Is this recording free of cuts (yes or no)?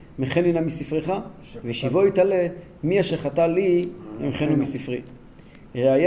yes